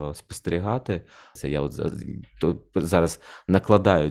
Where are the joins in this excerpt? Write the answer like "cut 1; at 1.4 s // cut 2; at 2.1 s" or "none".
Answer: cut 1; at 1.4 s